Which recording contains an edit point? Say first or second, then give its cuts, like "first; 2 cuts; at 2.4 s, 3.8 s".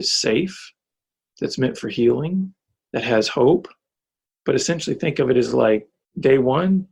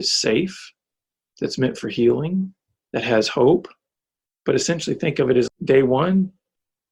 second; 1 cut; at 5.5 s